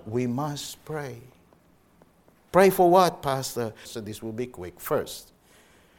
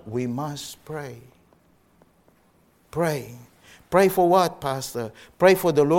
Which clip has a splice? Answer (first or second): first